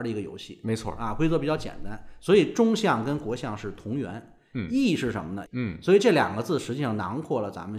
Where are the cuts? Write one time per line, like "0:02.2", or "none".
0:05.5